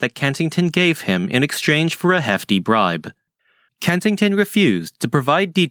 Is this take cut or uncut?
cut